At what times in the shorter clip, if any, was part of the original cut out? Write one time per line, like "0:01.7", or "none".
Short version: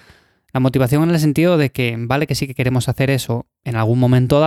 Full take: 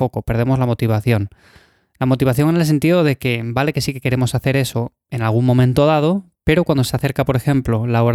none

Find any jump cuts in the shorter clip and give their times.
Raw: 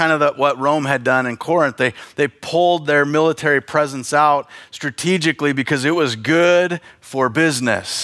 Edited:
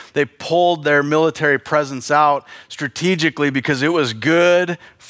none

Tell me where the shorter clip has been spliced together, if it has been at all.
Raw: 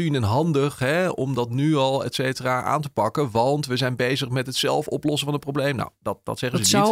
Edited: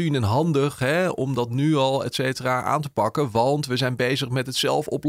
none

